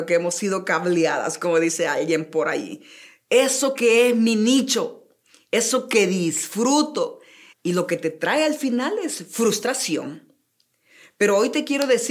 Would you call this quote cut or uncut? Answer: cut